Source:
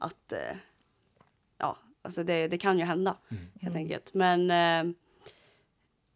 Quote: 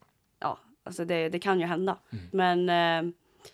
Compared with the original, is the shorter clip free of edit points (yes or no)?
no